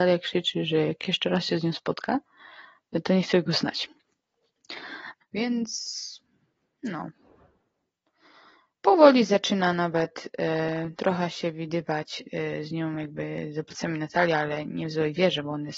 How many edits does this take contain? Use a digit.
1